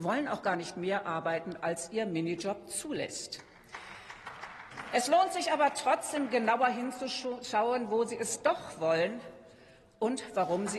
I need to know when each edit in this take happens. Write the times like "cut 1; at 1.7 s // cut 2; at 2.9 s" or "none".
none